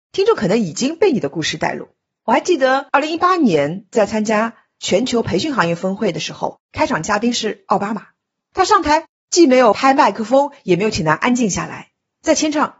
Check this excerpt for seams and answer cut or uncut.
uncut